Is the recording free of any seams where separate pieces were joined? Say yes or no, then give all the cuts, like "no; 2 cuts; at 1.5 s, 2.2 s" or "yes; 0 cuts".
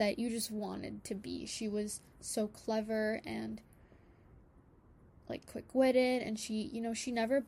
yes; 0 cuts